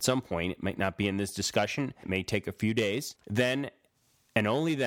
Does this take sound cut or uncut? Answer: cut